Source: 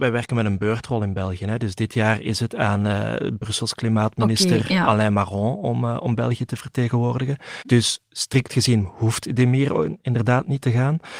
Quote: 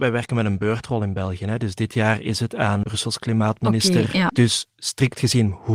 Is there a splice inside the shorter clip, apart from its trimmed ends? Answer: yes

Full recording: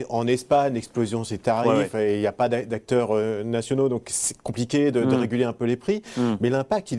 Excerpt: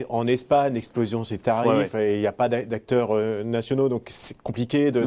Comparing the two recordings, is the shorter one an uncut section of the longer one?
yes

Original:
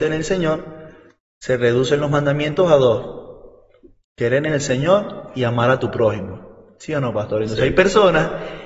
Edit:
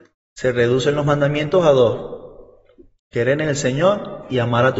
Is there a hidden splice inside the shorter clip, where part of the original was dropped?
no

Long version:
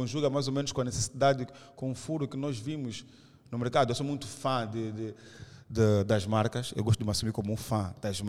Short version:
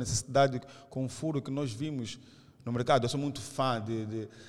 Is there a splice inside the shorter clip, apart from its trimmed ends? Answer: no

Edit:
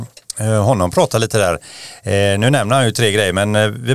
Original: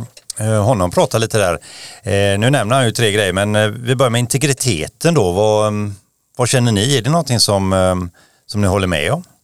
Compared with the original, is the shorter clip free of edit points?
yes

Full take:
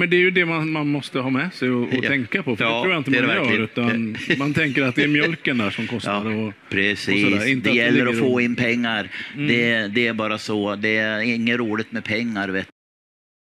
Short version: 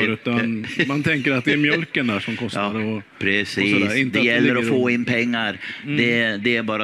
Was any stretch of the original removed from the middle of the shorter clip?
no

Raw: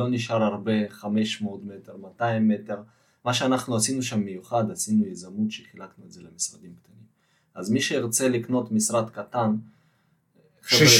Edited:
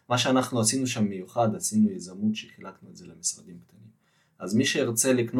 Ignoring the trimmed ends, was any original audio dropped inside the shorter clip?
no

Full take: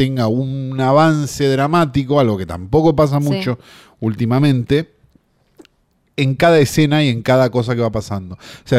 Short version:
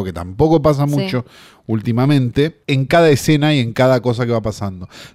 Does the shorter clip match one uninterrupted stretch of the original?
no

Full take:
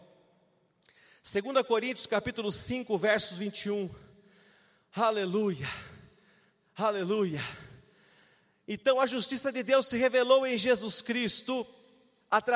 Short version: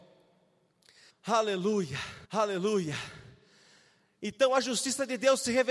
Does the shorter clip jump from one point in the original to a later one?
yes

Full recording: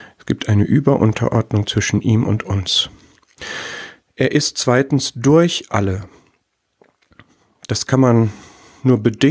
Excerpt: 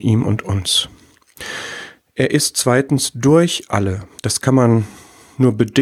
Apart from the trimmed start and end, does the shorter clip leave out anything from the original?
yes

